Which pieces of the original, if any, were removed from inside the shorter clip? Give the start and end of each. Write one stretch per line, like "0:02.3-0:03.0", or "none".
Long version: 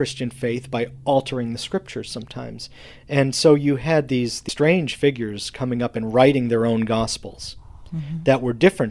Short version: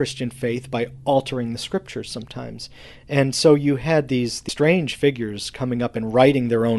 none